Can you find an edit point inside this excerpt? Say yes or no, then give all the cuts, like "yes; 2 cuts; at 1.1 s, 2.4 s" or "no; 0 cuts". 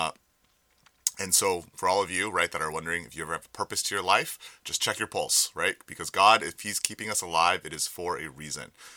no; 0 cuts